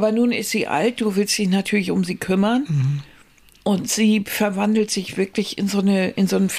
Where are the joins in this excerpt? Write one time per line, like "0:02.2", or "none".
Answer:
none